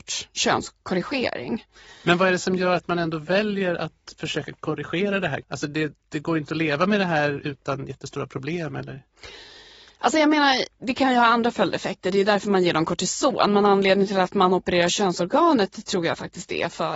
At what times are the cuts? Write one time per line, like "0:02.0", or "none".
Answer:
none